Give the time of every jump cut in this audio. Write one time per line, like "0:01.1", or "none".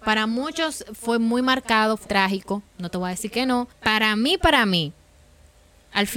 0:02.0
0:03.7